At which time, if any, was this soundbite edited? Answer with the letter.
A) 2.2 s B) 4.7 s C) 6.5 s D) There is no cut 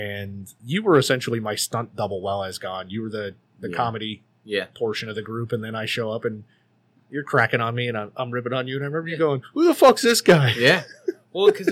D